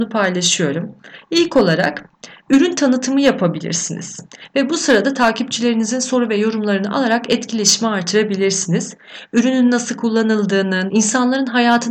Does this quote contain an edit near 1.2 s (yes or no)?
no